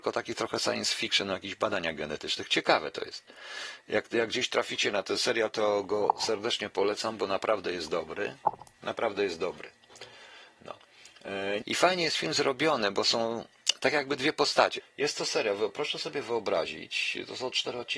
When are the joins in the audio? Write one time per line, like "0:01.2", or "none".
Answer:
0:11.6
0:14.8

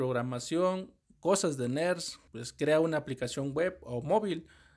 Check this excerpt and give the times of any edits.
0:02.3

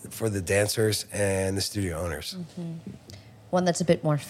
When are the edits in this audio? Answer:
none

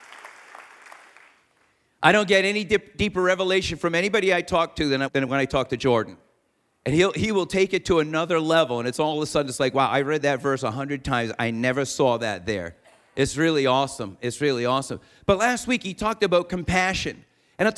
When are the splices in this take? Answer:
0:05.1

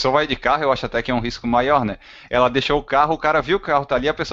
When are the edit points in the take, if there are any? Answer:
none

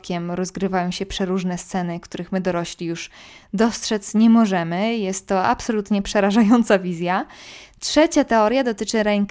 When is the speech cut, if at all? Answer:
none

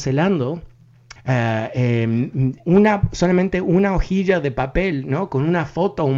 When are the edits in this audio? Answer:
0:01.2
0:02.6

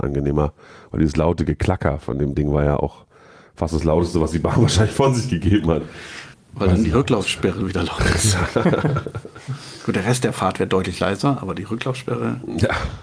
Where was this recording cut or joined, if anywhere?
0:06.3

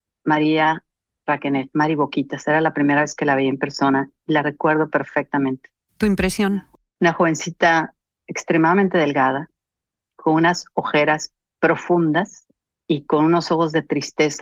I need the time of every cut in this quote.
none

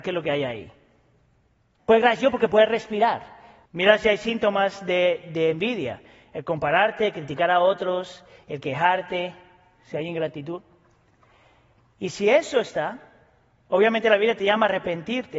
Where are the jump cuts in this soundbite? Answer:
0:01.8
0:03.7

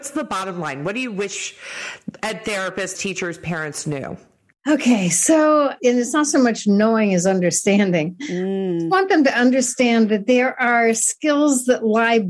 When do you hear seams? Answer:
0:02.9

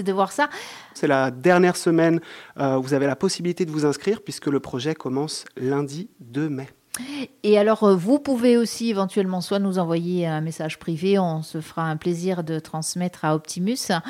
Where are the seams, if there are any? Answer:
0:01.0

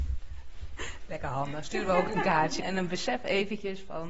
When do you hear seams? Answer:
0:02.6

